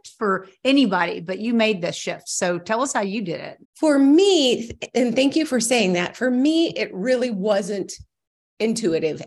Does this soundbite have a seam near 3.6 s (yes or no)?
yes